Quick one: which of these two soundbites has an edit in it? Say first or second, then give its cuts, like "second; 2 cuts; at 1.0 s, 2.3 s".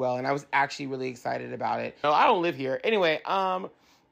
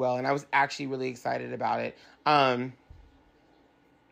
first; 1 cut; at 2.0 s